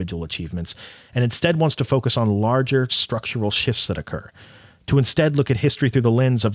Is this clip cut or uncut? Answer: uncut